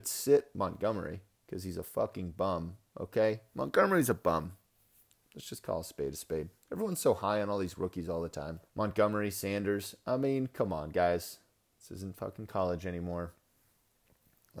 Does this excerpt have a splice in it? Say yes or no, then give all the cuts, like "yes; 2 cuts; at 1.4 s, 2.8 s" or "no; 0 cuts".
yes; 2 cuts; at 8.7 s, 11.7 s